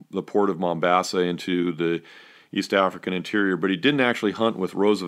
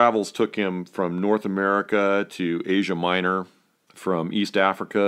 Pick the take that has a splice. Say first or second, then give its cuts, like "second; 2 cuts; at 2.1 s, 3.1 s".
second; 1 cut; at 3.9 s